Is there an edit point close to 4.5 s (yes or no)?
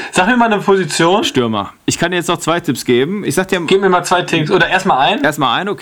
no